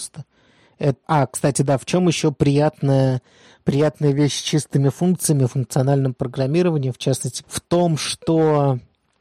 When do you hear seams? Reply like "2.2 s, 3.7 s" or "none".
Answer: 1.0 s, 7.4 s

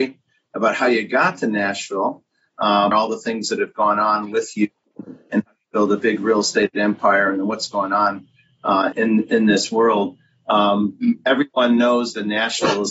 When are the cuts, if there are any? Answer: 2.9 s, 8.9 s

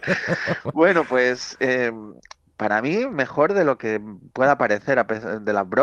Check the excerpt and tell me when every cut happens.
none

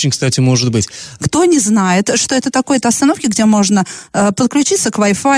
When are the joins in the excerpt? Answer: 1.2 s

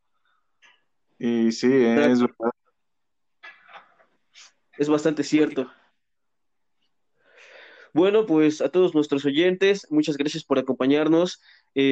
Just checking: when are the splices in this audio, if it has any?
none

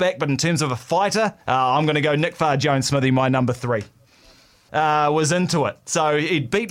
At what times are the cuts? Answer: 1.4 s, 4.7 s

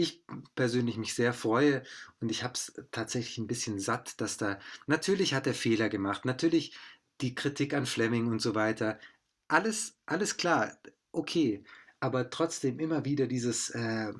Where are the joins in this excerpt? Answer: none

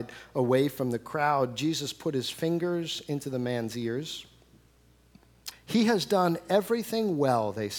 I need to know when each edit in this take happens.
5.5 s

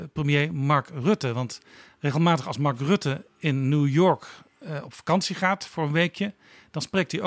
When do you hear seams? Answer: none

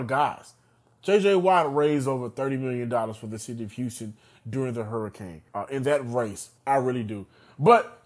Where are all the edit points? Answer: 5.5 s, 6.6 s

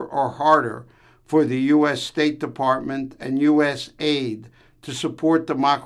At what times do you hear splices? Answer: none

